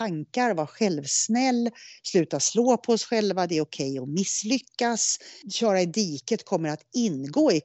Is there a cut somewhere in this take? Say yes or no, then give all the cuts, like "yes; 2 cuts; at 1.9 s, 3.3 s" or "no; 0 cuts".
yes; 1 cut; at 5.4 s